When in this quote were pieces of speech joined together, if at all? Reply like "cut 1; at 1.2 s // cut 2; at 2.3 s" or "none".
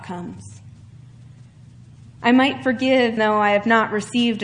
cut 1; at 3.2 s